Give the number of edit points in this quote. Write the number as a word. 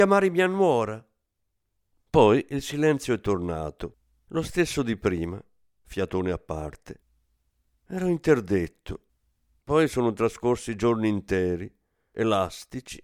zero